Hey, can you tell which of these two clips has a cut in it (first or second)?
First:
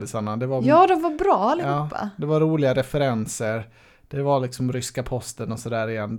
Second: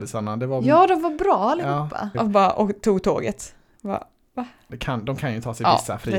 second